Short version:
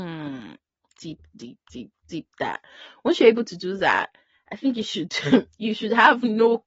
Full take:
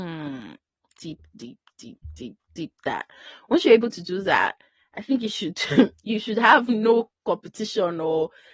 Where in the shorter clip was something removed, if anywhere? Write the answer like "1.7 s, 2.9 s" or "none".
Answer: 1.7 s